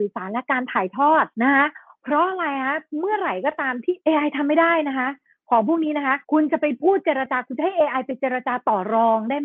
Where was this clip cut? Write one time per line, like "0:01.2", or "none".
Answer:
0:01.3
0:04.0
0:06.2